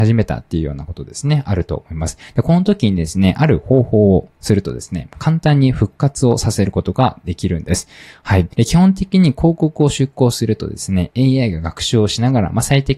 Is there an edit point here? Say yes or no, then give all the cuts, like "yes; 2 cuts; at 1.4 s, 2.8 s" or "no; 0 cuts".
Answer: yes; 1 cut; at 8.5 s